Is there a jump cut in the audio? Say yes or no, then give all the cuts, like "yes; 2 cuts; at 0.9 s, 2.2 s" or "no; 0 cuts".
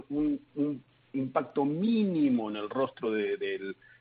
no; 0 cuts